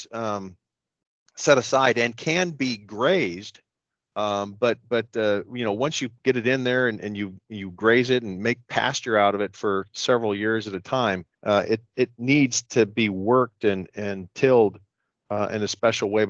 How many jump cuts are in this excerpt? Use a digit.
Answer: 1